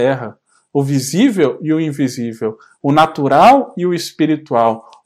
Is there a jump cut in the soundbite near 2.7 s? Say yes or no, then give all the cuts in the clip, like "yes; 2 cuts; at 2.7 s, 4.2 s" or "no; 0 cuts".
no; 0 cuts